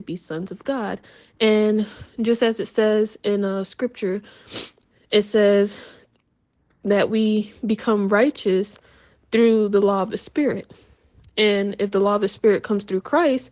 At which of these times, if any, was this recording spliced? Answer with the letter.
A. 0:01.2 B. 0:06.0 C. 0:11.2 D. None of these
A